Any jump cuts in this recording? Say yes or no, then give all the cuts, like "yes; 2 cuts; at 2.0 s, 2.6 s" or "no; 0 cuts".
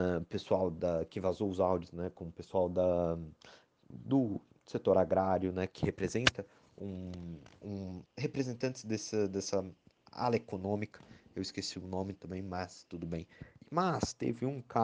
yes; 3 cuts; at 3.9 s, 8.1 s, 13.6 s